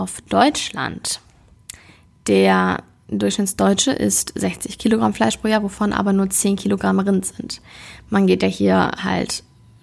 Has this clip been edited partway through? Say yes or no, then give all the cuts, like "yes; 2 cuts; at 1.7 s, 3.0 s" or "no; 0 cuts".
no; 0 cuts